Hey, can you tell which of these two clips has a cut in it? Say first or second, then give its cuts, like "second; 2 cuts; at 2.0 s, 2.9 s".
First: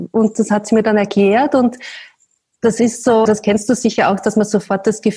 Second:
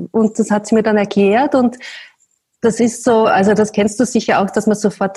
first; 1 cut; at 3.3 s